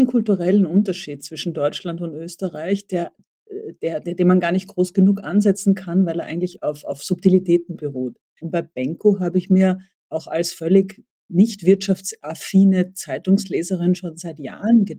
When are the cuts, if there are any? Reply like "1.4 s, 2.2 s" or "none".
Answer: 8.4 s